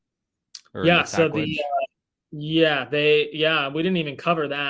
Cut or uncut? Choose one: uncut